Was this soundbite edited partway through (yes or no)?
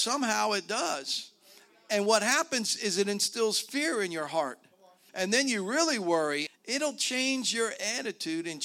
yes